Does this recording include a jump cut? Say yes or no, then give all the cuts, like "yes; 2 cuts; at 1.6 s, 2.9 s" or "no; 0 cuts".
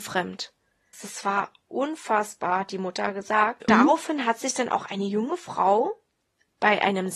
yes; 2 cuts; at 0.9 s, 3.7 s